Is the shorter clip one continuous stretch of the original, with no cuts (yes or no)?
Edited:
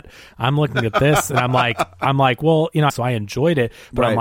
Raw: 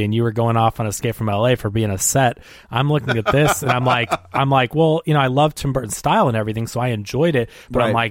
no